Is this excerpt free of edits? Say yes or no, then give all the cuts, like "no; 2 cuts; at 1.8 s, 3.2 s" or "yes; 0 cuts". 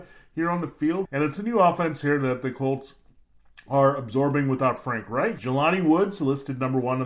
no; 2 cuts; at 1.0 s, 5.4 s